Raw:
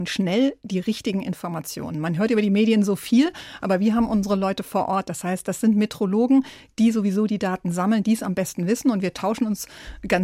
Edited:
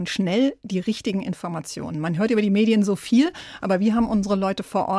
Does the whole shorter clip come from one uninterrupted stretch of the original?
yes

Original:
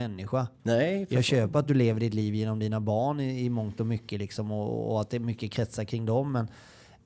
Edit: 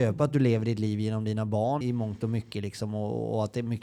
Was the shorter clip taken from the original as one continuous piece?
no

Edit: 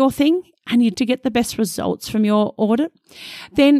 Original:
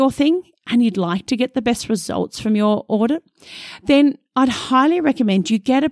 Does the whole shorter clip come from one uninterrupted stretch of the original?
no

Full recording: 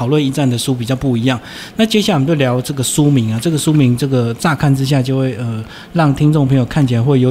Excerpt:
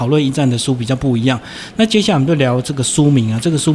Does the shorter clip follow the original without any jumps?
yes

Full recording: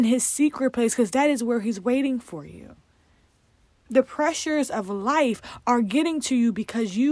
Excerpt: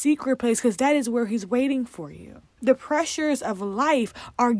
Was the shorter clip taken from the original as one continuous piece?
no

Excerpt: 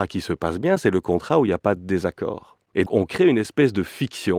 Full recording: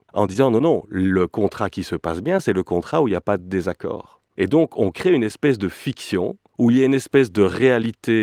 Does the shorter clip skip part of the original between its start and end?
yes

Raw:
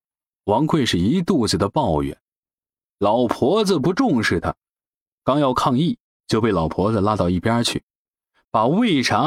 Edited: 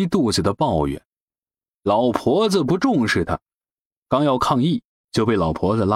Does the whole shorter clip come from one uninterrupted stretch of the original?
yes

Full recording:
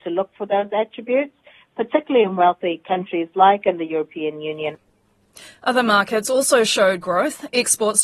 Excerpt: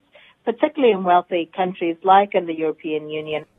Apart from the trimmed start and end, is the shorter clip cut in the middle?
no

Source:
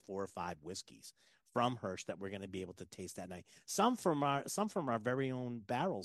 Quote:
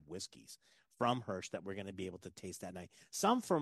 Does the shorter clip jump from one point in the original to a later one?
no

